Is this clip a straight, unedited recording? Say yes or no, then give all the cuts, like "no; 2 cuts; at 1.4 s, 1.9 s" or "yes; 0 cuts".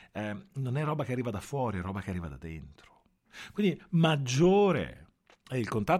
yes; 0 cuts